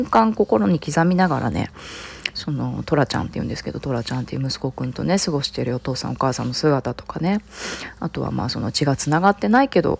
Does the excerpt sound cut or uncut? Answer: uncut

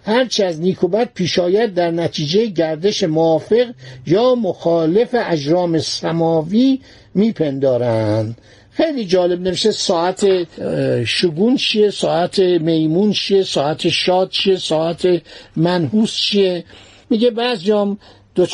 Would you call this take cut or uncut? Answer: uncut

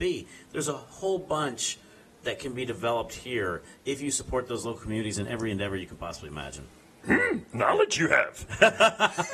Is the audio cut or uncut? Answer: cut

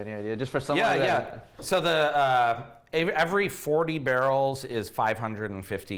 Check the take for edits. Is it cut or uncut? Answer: uncut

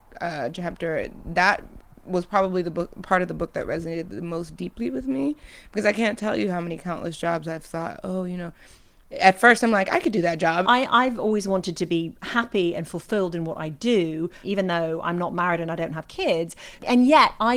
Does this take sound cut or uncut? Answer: cut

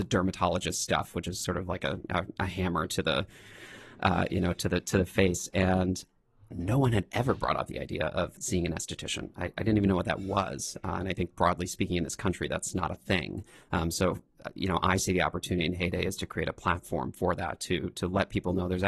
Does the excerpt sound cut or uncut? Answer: uncut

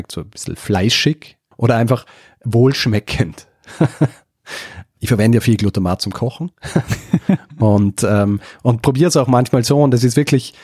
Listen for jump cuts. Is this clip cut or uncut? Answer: uncut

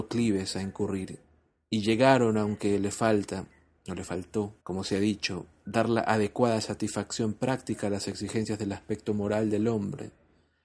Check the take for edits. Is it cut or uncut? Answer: cut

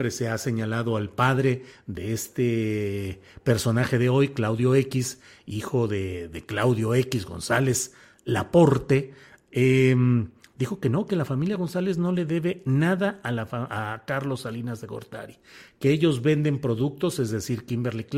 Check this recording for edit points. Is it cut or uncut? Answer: uncut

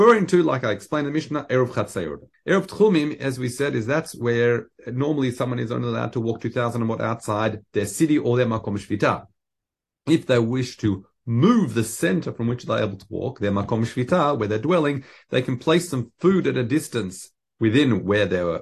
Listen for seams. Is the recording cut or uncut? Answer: cut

